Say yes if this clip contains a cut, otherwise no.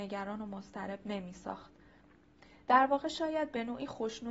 no